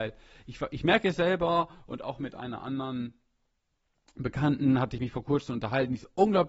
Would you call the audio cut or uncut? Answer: uncut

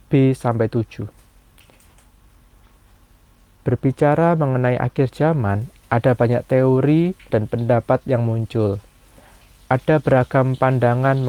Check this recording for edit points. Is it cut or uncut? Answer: cut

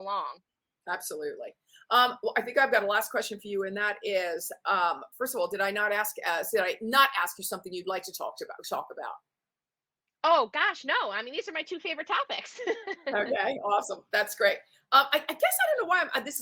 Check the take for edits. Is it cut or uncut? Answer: uncut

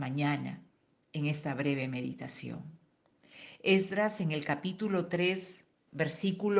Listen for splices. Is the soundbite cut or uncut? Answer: uncut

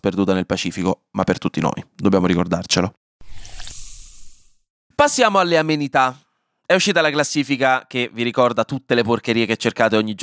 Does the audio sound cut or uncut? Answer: uncut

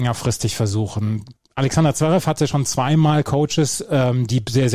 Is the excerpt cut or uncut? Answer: uncut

